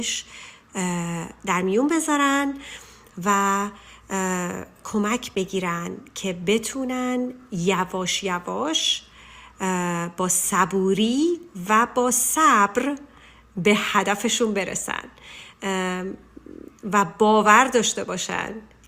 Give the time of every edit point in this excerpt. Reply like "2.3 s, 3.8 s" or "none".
none